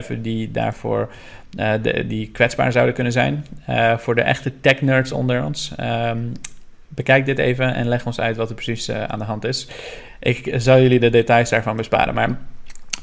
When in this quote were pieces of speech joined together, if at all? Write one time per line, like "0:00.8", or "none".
none